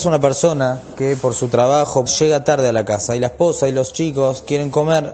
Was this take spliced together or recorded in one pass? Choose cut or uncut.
cut